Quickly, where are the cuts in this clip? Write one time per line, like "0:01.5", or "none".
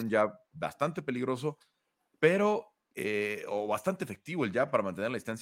none